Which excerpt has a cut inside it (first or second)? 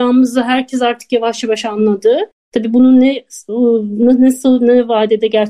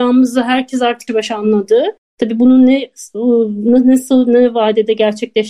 second